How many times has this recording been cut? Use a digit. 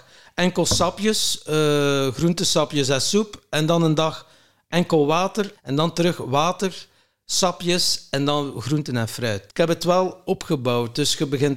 2